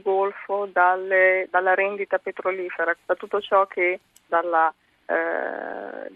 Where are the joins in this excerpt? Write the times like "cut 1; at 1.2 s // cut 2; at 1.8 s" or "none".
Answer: cut 1; at 2.9 s // cut 2; at 4.3 s